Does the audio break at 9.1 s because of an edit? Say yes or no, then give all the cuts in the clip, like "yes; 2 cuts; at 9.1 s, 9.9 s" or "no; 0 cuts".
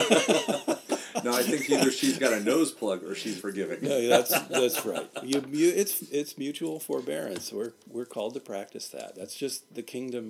no; 1 cut; at 3.4 s